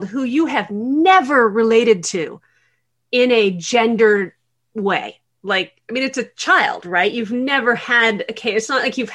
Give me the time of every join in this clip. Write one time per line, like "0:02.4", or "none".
none

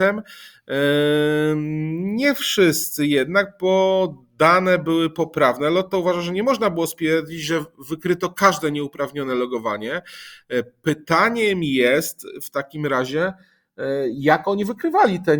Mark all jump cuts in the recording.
none

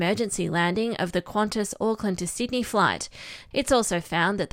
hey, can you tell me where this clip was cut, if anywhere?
0:03.5

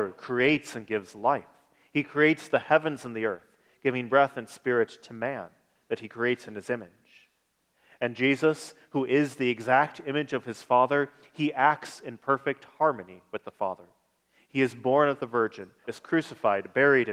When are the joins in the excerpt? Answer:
0:15.8

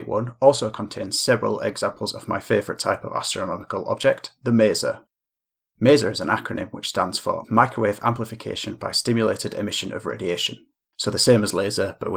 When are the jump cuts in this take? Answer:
none

